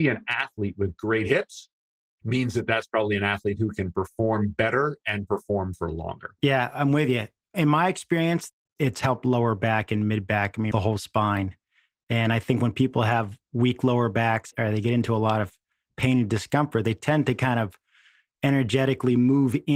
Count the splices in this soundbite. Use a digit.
3